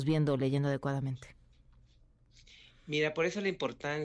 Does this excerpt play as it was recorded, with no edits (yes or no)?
yes